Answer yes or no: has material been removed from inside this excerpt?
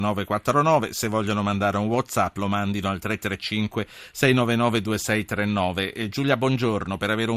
no